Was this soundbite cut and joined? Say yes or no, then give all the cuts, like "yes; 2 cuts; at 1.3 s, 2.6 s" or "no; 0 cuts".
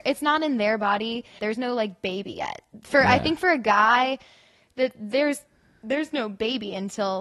yes; 1 cut; at 1.4 s